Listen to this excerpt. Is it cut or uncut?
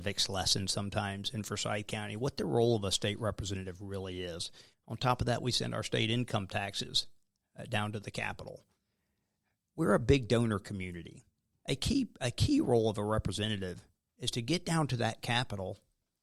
cut